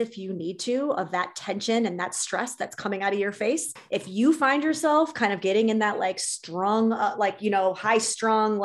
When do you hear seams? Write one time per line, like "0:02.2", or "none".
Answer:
0:03.8